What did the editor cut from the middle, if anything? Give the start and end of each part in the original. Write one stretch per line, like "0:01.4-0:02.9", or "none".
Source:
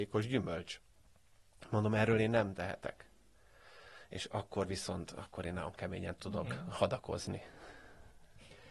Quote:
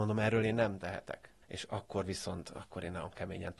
0:03.2-0:04.0